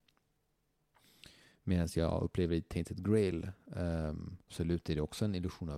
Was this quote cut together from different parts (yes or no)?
yes